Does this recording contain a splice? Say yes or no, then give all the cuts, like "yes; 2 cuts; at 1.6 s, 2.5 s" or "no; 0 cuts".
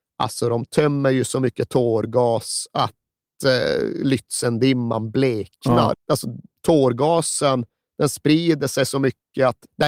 yes; 1 cut; at 5.9 s